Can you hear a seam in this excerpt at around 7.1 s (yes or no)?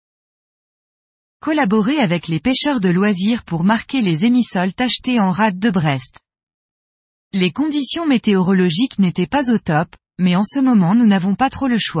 yes